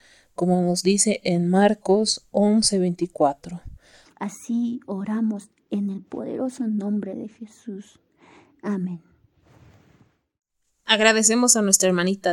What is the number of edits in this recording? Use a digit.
1